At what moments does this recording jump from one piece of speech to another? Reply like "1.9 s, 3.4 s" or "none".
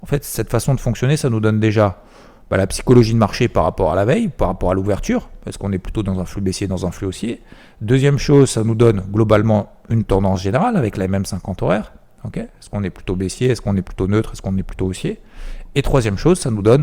none